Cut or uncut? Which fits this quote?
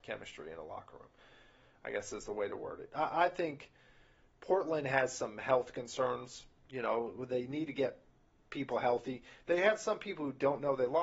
uncut